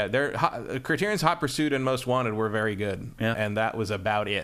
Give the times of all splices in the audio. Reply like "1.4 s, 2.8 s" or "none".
3.3 s